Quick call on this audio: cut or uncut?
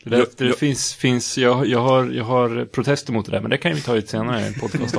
uncut